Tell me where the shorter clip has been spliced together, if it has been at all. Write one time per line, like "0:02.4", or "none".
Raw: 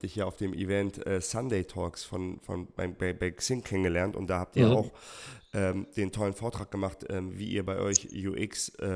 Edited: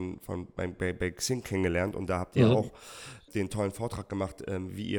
0:03.3

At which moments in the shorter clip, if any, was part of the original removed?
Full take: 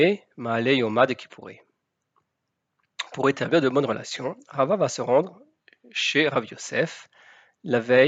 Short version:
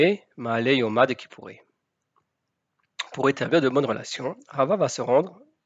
none

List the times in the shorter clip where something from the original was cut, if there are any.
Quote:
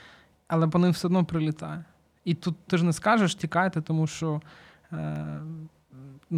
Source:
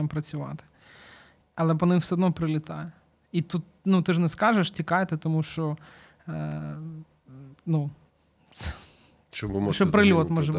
0:02.7

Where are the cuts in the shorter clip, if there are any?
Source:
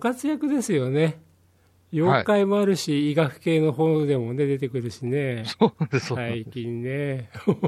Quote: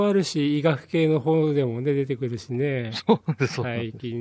none

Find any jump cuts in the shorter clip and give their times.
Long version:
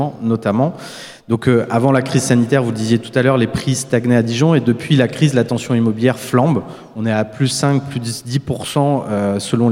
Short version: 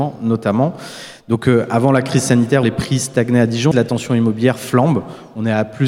0:02.6
0:03.7

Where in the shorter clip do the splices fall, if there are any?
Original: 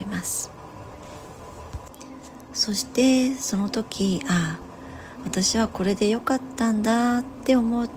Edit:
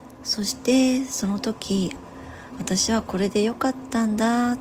0:01.9

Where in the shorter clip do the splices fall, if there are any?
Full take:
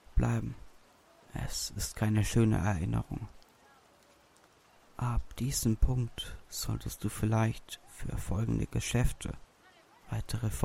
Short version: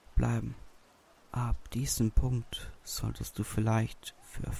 0:01.1

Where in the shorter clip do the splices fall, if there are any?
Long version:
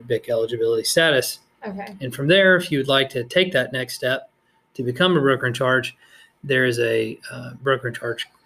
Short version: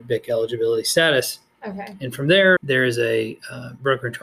0:02.6

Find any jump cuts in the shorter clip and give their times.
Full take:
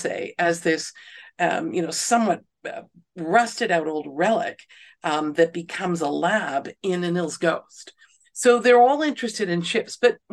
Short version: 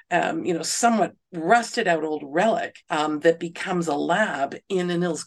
0:01.2
0:02.8

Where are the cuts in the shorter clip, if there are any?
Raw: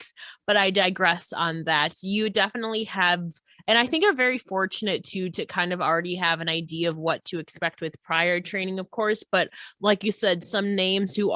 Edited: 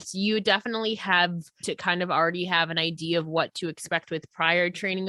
0:01.6

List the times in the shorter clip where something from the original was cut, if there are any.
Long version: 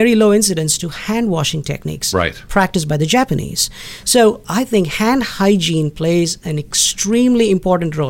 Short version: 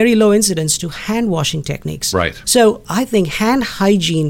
0:02.4

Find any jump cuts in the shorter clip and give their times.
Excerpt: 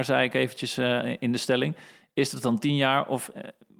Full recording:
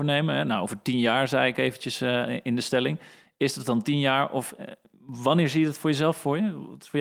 none

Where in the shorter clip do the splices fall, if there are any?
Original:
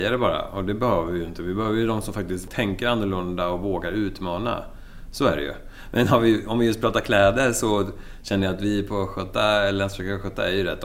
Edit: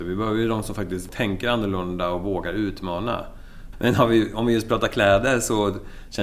0:03.7

